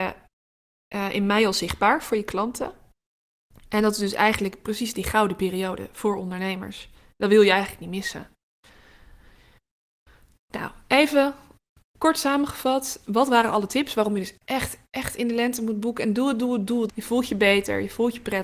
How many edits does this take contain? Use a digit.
2